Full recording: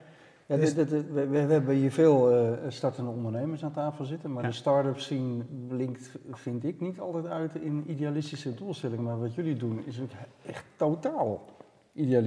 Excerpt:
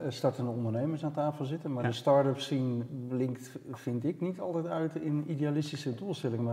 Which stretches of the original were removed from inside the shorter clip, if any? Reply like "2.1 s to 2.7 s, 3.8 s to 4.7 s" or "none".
none